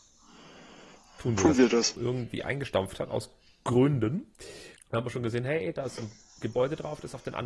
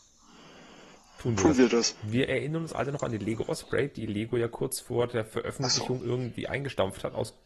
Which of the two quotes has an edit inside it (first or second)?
first